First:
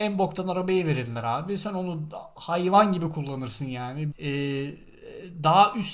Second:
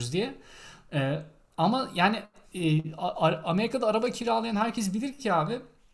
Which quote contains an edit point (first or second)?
first